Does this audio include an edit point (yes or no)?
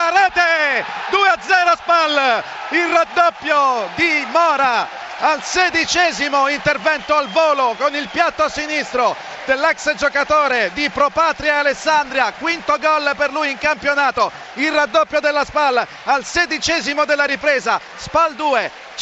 no